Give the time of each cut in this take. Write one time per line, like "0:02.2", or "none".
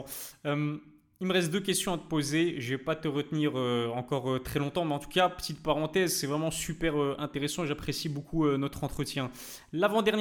none